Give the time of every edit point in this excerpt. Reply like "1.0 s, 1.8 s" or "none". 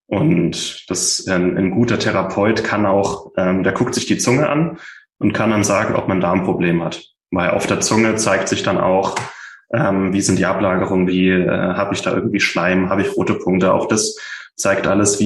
11.1 s, 12.9 s